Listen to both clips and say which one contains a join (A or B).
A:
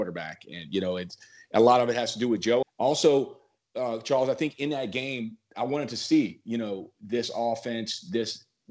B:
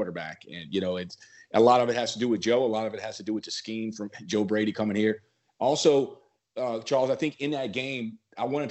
A